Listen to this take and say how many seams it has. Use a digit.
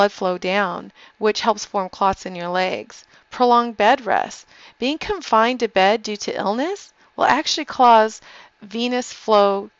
0